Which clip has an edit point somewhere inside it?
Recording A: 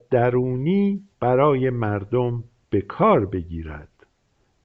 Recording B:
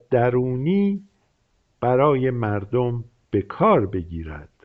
A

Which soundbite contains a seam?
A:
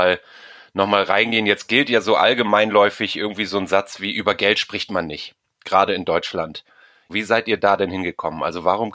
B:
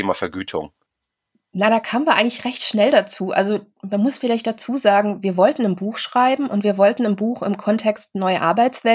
A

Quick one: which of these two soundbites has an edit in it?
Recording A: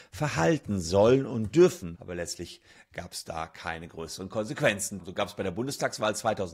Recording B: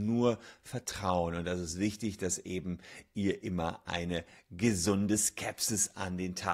A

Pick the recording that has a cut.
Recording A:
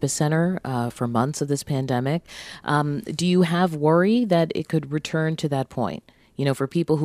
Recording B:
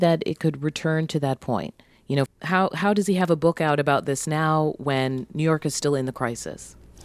B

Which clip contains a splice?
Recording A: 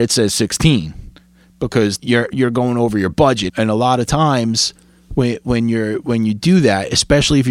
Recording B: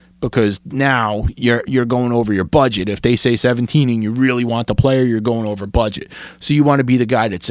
A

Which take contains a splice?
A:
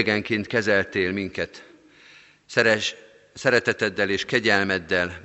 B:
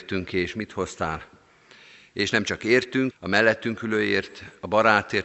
B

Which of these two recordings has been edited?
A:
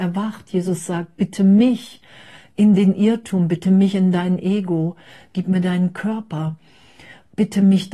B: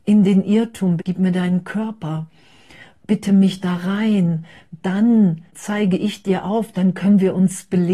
B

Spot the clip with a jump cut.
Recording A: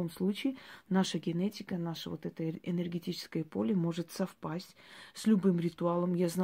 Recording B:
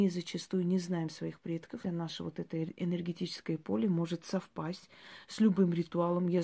B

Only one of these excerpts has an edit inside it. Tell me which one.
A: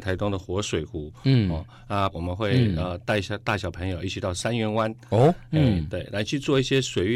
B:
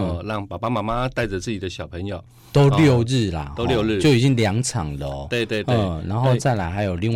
A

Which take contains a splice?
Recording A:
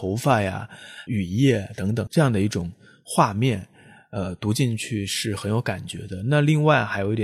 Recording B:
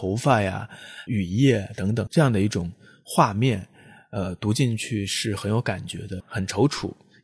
B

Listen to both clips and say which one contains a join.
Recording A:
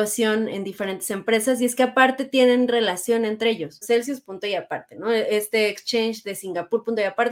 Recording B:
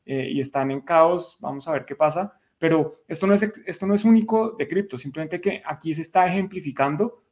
A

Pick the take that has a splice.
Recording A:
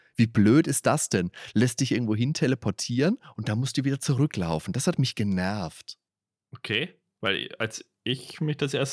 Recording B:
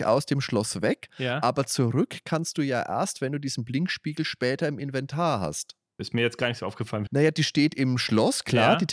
B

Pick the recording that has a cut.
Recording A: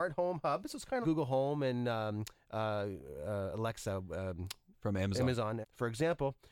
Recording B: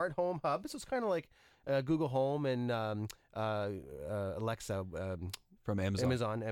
A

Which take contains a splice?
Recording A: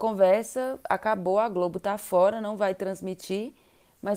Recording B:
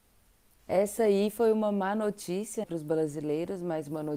B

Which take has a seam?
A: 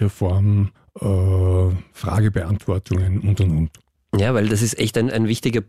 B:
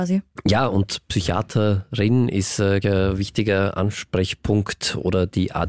B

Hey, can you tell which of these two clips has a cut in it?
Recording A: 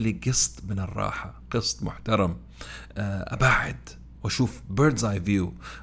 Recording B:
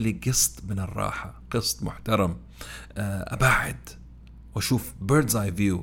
A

